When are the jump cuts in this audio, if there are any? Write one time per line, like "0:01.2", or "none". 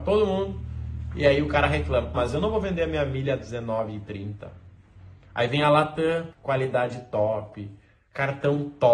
0:02.1
0:06.3